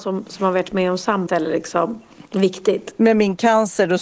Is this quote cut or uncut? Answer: cut